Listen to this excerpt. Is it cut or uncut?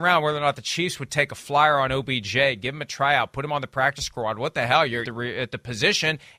cut